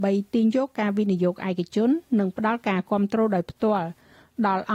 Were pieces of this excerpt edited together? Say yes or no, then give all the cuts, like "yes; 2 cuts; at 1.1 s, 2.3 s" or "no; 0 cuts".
no; 0 cuts